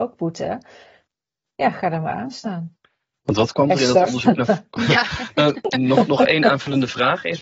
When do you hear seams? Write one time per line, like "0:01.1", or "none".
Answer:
none